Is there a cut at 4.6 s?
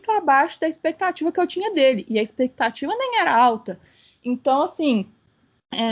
no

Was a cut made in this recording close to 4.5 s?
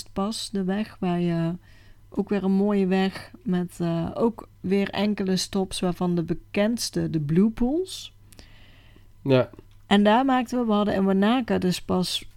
yes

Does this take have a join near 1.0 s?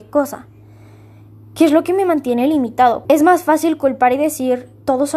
no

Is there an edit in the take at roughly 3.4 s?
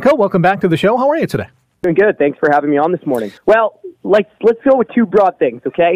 yes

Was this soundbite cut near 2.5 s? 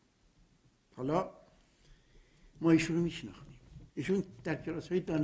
no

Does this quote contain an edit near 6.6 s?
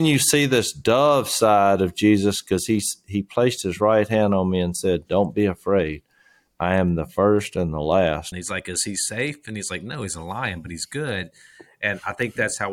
no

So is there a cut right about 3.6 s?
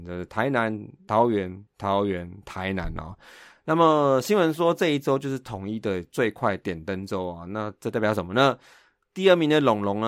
no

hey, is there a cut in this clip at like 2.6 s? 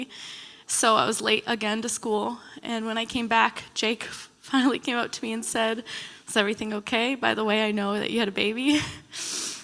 no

